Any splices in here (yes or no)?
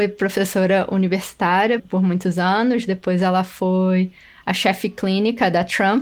yes